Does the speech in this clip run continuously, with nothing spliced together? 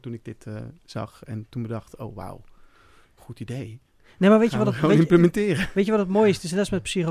yes; 0 cuts

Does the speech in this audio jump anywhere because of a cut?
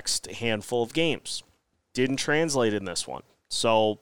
yes; 1 cut; at 1.7 s

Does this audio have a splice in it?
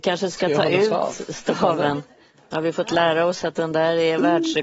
no; 0 cuts

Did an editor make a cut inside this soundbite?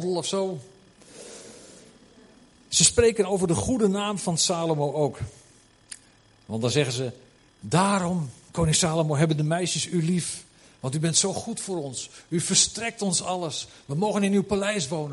no; 0 cuts

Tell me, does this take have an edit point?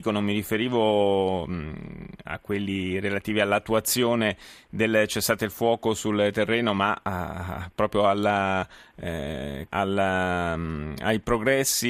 yes; 1 cut; at 9.7 s

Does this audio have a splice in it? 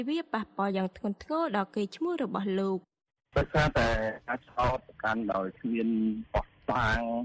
no; 0 cuts

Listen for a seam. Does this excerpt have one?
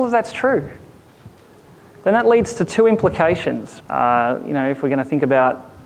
yes; 1 cut; at 3.8 s

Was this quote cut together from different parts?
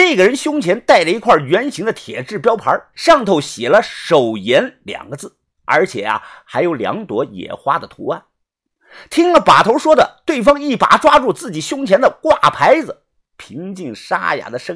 yes; 1 cut; at 2.9 s

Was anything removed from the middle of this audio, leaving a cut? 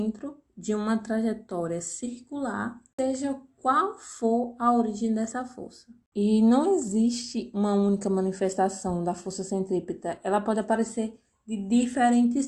no; 0 cuts

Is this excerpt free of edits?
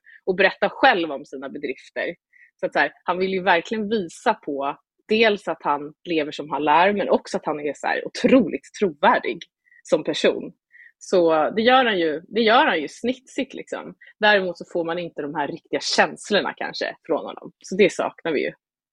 yes; 0 cuts

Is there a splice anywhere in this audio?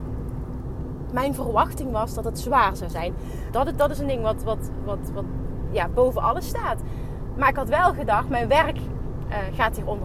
yes; 1 cut; at 3.5 s

